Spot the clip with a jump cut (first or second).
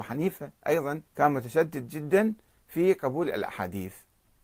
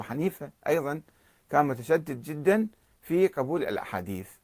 first